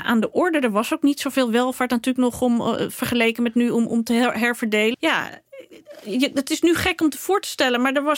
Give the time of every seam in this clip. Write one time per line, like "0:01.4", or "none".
0:04.9